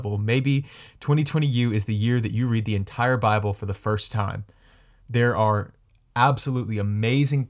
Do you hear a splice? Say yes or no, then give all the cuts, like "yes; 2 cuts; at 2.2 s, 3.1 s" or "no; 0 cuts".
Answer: no; 0 cuts